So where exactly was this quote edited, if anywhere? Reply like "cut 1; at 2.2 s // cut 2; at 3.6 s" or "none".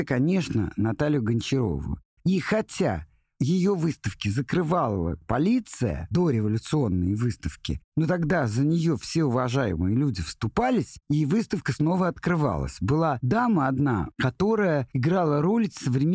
cut 1; at 2.2 s // cut 2; at 5.2 s // cut 3; at 7.8 s